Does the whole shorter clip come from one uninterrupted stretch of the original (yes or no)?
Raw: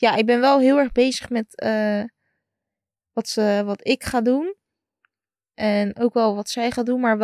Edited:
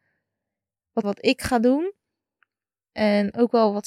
no